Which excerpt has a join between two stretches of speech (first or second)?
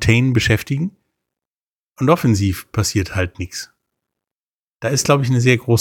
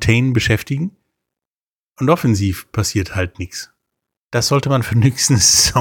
second